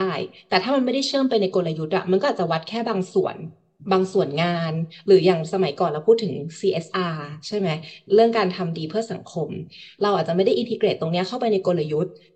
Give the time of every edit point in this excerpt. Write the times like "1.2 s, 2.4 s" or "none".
none